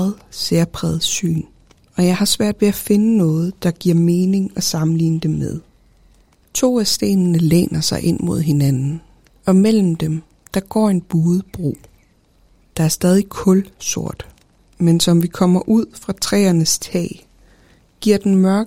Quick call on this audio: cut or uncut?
uncut